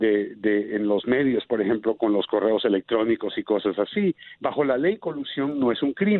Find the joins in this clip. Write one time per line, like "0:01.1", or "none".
0:04.3